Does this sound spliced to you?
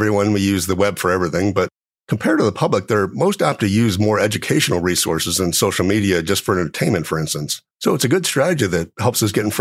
yes; 1 cut; at 7.7 s

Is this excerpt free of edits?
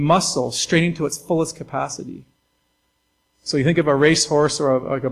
yes; 0 cuts

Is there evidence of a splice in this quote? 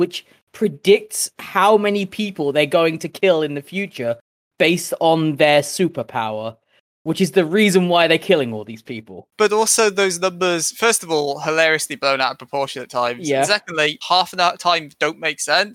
yes; 2 cuts; at 9.3 s, 14.0 s

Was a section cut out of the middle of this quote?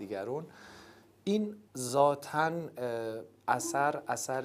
yes; 1 cut; at 1.7 s

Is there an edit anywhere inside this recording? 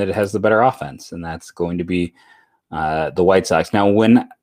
no; 0 cuts

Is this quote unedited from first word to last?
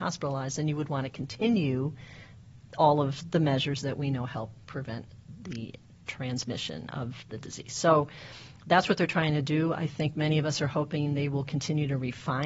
yes; 0 cuts

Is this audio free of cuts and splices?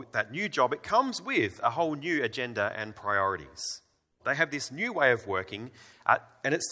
no; 1 cut; at 4.2 s

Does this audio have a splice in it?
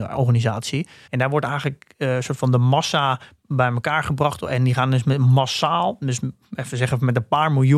yes; 1 cut; at 1.1 s

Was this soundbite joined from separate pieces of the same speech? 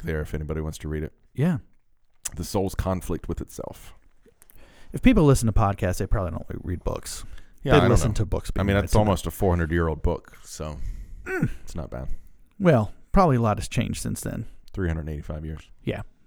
no; 0 cuts

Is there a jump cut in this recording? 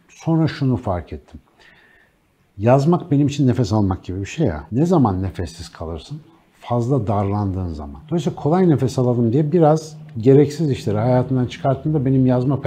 no; 0 cuts

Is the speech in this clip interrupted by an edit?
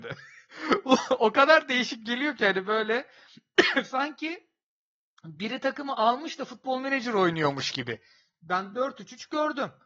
no; 0 cuts

